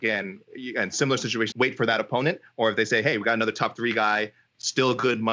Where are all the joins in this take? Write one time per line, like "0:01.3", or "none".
0:01.5